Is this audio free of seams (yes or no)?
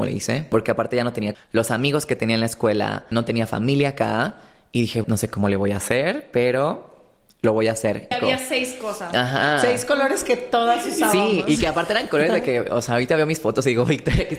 no